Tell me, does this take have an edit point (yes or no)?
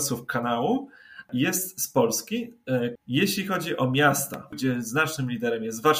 yes